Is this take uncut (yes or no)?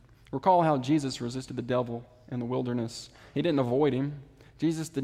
yes